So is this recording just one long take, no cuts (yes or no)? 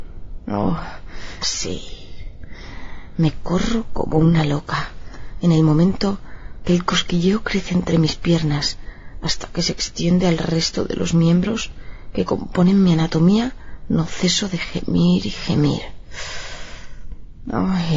no